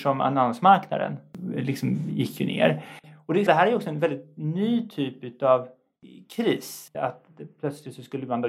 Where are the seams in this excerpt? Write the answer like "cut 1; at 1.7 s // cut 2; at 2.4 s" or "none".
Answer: cut 1; at 3.5 s // cut 2; at 6.9 s